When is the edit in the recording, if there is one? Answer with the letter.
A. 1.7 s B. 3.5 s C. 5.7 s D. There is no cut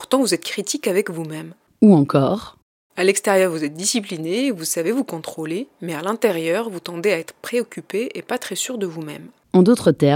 D